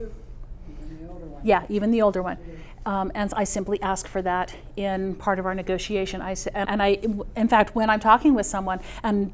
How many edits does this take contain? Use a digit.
1